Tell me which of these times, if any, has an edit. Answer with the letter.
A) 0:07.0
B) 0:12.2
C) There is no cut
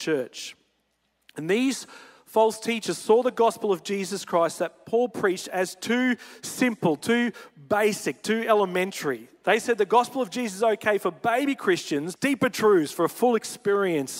B